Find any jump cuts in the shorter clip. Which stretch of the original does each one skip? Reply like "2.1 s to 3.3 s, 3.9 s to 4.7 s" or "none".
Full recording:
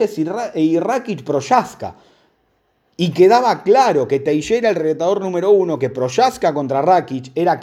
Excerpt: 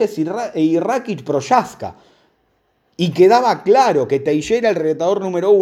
none